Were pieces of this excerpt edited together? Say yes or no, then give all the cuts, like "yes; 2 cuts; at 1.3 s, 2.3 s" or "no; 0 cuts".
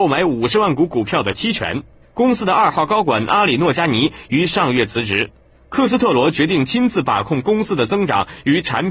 yes; 1 cut; at 2.0 s